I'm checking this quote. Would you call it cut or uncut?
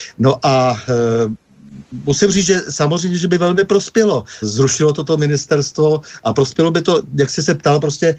cut